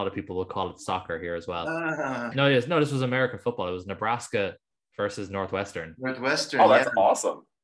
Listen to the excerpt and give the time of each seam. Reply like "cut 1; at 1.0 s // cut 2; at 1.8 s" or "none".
cut 1; at 2.3 s